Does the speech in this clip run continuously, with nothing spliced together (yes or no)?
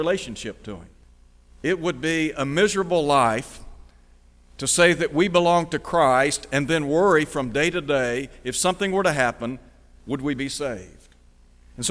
yes